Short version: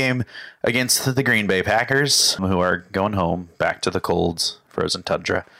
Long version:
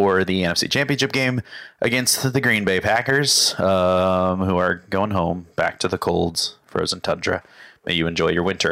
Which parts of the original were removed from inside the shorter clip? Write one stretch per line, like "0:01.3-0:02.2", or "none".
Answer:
0:03.6-0:04.4